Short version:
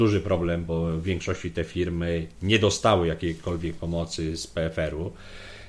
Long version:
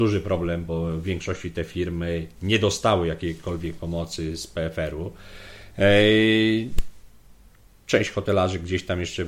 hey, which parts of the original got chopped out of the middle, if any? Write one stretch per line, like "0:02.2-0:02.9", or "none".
none